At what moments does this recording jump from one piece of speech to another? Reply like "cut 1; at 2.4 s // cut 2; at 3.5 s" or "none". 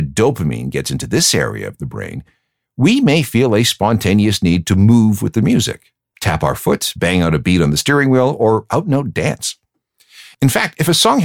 none